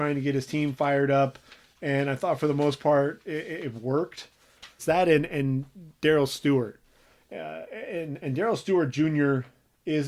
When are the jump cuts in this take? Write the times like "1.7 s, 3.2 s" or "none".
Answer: 4.8 s